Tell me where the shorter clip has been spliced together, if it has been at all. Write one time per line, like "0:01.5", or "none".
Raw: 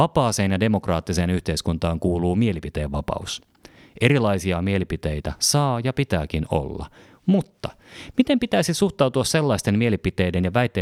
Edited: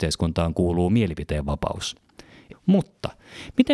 0:02.5